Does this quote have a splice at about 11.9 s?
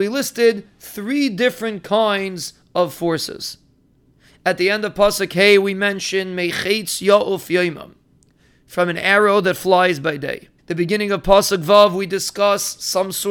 no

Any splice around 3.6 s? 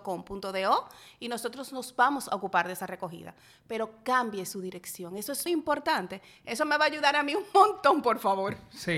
no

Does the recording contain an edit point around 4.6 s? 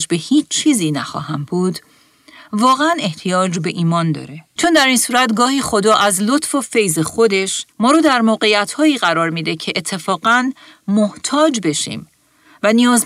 yes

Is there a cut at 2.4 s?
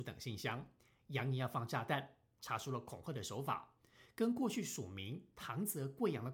yes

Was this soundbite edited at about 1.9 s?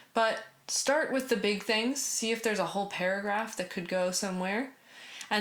no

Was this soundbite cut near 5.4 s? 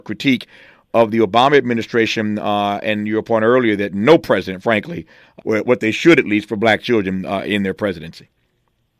yes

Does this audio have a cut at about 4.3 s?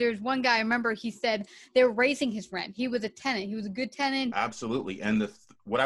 yes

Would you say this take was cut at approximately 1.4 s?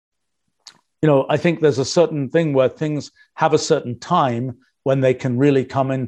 no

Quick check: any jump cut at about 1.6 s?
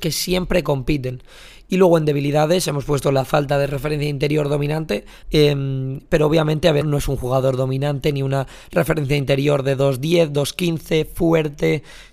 no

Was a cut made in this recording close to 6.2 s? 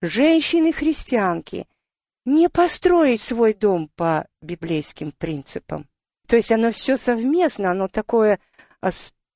yes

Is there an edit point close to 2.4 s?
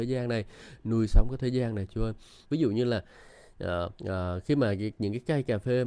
yes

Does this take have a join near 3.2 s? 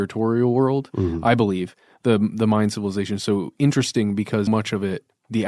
no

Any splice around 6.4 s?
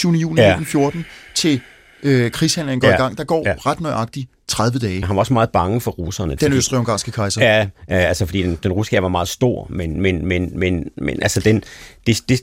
yes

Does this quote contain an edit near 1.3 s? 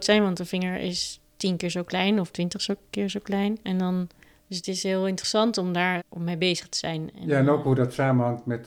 no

